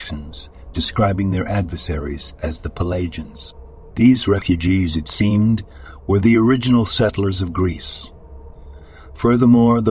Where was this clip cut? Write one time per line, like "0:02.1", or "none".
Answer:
0:03.9